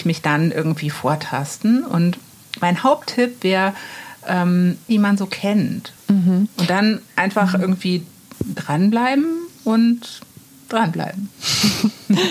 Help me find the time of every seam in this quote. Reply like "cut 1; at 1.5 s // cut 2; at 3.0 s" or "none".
cut 1; at 4.9 s // cut 2; at 6.0 s

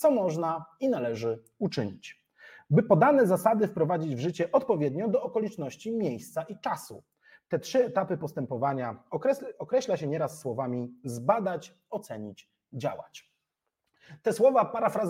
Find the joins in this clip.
none

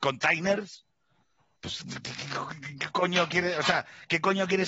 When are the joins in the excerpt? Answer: none

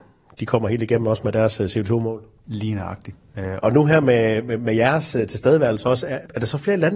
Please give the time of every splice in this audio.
cut 1; at 3.6 s

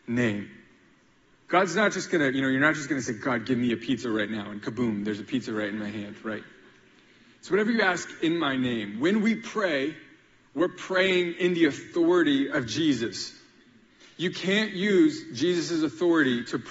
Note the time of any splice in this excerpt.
none

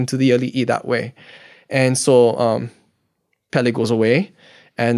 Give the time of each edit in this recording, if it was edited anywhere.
none

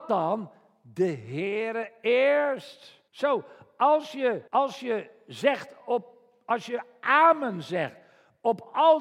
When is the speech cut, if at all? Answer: cut 1; at 3.1 s // cut 2; at 4.5 s

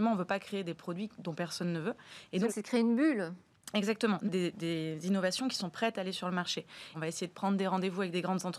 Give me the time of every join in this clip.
cut 1; at 2.5 s // cut 2; at 4.3 s // cut 3; at 6.9 s

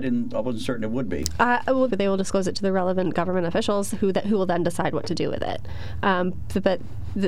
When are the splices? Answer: cut 1; at 1.9 s

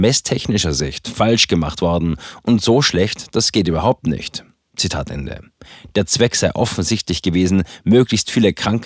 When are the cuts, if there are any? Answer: none

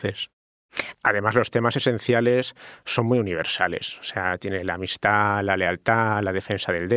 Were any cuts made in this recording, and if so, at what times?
cut 1; at 0.9 s

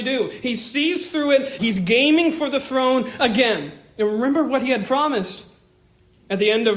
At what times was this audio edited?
cut 1; at 1.6 s

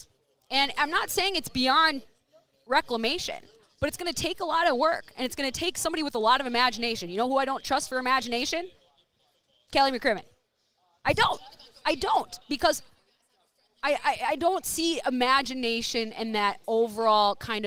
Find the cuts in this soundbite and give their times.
none

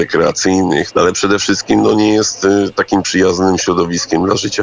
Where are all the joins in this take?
cut 1; at 0.9 s

